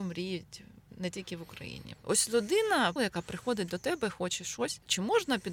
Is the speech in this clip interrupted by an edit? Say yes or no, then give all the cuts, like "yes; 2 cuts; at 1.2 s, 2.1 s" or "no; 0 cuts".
yes; 2 cuts; at 1.9 s, 3.0 s